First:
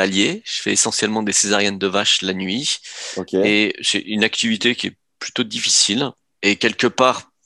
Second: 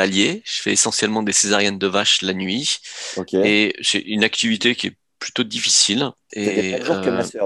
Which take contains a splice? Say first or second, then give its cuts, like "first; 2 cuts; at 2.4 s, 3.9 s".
second; 1 cut; at 6.3 s